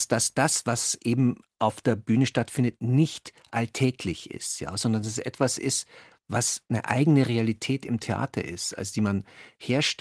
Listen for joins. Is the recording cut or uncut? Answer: uncut